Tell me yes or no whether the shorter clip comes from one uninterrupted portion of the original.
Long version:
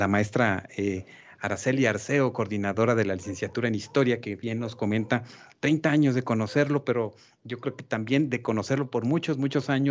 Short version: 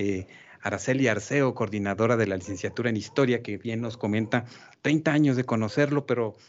yes